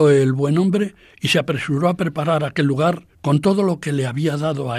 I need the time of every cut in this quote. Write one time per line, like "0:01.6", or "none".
0:03.1